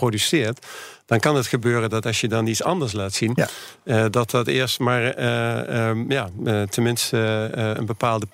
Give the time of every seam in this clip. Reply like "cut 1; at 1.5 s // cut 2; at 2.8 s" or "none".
none